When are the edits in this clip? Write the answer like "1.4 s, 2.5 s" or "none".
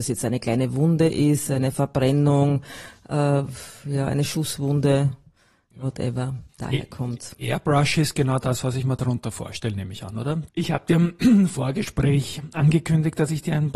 6.5 s, 10.5 s